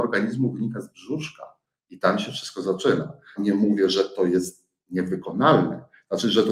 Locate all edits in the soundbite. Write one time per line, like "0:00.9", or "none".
0:03.4

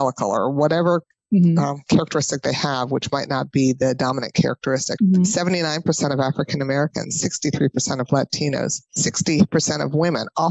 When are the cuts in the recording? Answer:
0:05.0

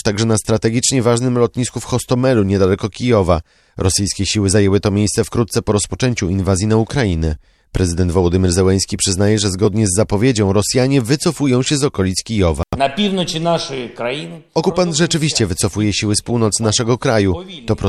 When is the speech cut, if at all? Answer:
none

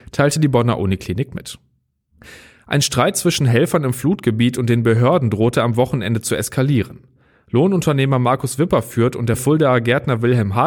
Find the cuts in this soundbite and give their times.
none

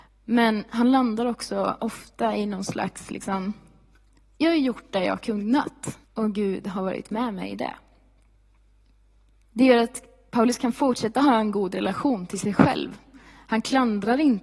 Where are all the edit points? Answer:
0:06.0
0:09.3

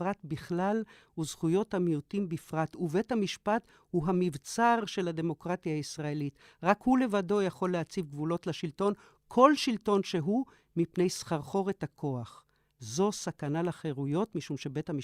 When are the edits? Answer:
0:12.7

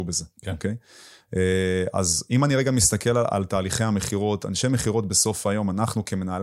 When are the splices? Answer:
none

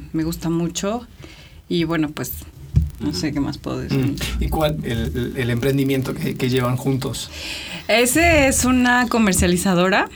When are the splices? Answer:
0:04.8

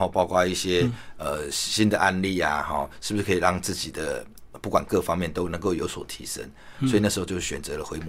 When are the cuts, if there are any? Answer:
none

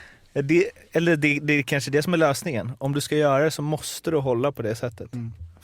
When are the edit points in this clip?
none

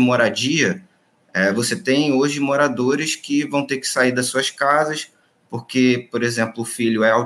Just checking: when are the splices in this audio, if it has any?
none

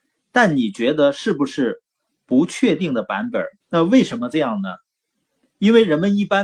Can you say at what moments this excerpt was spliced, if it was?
0:03.6

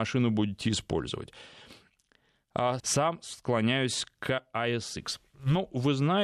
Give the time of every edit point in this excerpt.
0:02.8

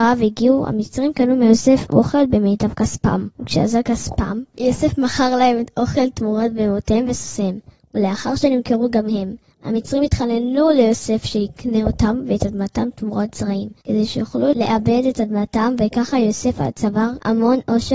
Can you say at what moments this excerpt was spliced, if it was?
none

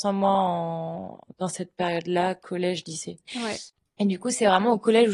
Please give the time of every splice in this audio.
0:03.3

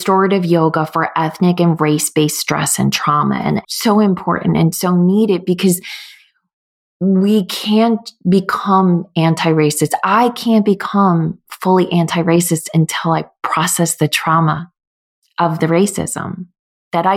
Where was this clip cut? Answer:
0:03.6

